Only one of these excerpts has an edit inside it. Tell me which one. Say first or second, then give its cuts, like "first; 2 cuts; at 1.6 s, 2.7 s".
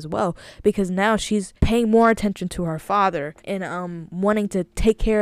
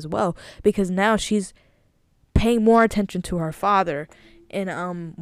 first; 2 cuts; at 1.6 s, 3.4 s